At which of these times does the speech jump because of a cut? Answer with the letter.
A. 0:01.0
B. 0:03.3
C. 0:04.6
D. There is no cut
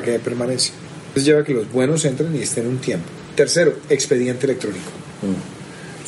D